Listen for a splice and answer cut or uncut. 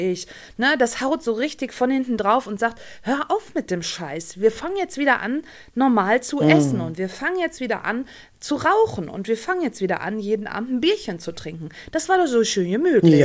uncut